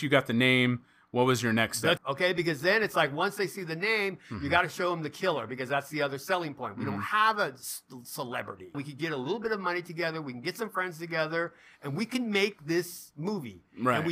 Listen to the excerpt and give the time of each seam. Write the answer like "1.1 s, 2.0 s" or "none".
2.0 s, 8.7 s